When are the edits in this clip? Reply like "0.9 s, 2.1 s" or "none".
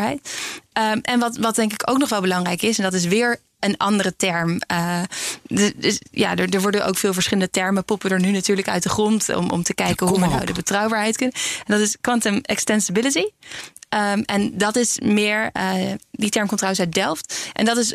none